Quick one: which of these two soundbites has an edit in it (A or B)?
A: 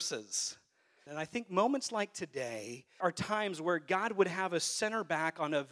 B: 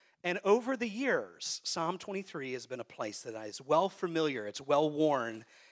A